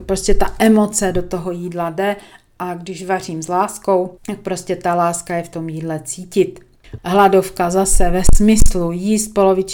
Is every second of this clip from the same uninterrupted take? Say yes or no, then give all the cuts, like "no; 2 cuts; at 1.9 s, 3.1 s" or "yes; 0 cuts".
no; 2 cuts; at 4.2 s, 7.0 s